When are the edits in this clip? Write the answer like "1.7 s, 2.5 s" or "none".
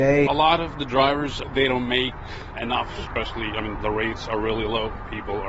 2.5 s, 3.7 s